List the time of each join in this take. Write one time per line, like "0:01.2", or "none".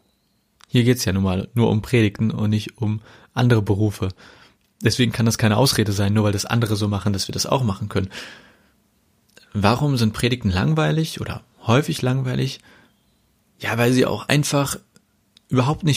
none